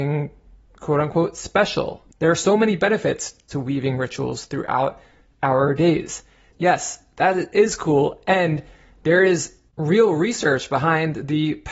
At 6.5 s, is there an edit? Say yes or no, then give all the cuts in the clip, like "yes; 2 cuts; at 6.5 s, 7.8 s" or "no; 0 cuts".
yes; 2 cuts; at 6.5 s, 9.7 s